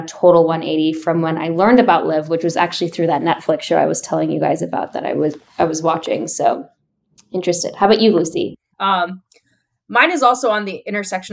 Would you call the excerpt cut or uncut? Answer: cut